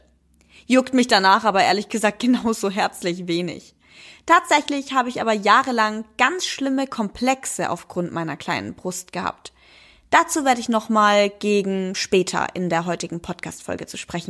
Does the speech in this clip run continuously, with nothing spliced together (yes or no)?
yes